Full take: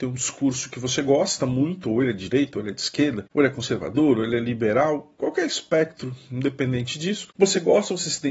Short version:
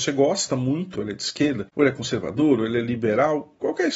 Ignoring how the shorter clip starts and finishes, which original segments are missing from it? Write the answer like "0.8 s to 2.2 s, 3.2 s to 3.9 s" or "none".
1.8 s to 2.5 s